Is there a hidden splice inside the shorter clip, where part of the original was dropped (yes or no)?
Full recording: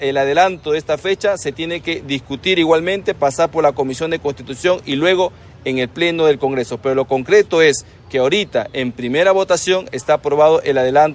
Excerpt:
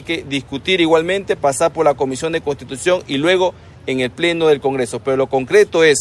no